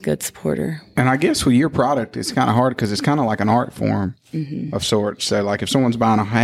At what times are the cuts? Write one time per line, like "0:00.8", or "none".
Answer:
none